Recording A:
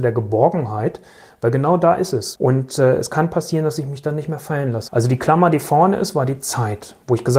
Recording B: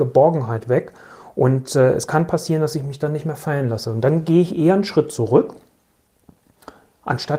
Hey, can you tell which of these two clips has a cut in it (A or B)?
A